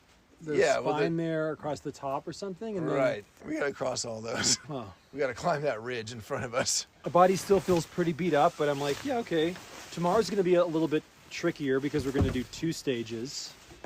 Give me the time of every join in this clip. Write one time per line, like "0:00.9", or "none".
0:03.4
0:04.6
0:07.0